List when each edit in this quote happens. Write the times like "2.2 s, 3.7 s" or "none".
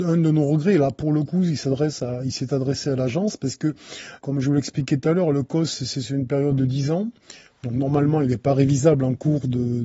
4.2 s